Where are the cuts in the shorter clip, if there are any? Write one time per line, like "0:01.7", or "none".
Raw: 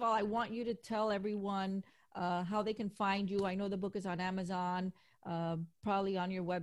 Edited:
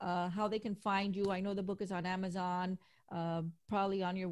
none